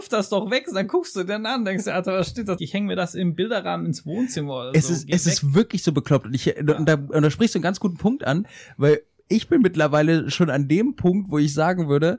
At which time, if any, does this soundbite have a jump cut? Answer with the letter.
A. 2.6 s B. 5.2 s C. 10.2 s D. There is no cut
A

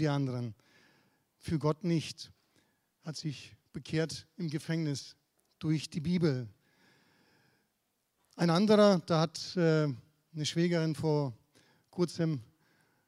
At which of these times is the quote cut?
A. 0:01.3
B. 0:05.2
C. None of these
C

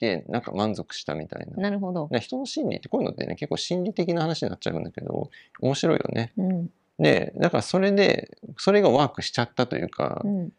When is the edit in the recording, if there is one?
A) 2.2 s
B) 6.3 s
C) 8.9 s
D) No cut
D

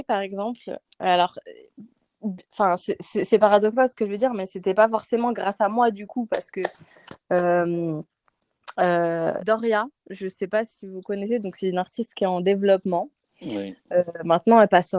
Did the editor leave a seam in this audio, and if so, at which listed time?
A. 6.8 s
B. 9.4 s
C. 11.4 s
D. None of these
B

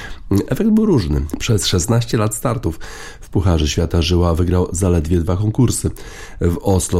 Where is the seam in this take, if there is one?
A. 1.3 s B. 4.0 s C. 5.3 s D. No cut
A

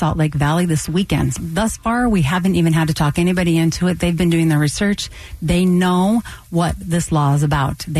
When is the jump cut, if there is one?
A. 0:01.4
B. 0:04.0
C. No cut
A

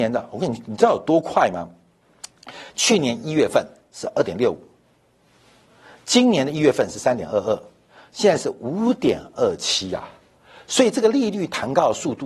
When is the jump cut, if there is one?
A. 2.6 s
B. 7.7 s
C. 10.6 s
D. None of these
D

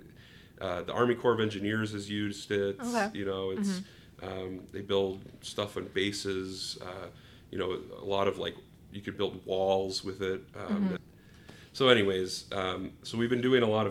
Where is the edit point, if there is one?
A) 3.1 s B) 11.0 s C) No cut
B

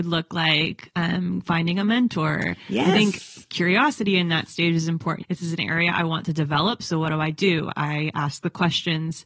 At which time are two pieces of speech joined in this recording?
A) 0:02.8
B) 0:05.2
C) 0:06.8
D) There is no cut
B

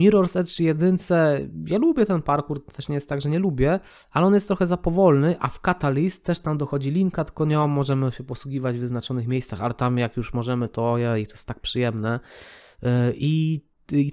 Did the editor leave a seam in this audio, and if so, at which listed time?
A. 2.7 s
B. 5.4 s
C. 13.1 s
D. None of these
D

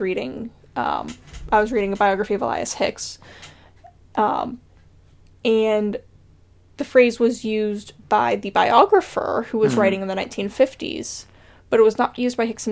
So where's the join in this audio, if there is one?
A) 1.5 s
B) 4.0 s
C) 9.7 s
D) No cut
D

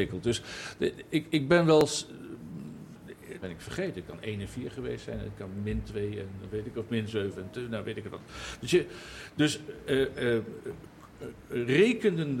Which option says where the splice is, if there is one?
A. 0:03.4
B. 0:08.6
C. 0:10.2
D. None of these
A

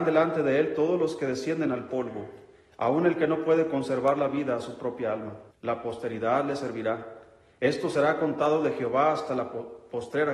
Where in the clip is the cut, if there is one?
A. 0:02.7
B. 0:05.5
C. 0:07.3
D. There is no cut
B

